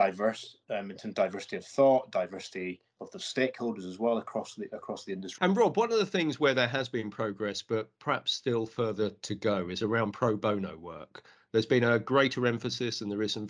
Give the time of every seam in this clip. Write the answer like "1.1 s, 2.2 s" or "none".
5.4 s